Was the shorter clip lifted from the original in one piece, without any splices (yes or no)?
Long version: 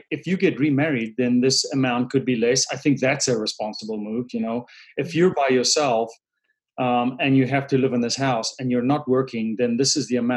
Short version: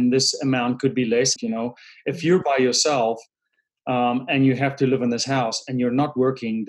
no